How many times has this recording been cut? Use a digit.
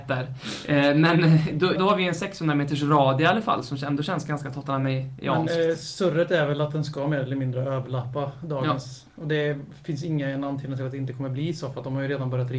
1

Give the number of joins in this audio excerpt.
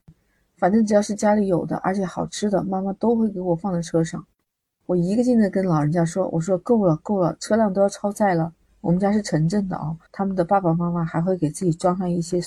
2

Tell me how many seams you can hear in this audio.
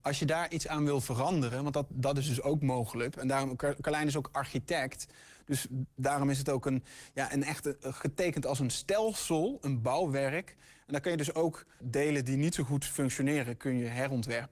2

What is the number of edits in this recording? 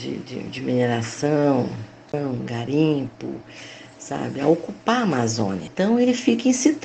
0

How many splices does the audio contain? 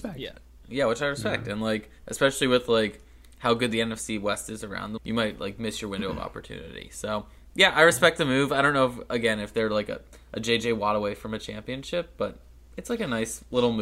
1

